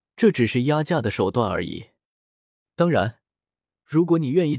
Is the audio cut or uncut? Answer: uncut